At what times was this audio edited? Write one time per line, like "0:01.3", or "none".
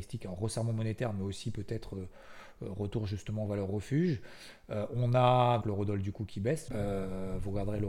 0:05.6
0:06.7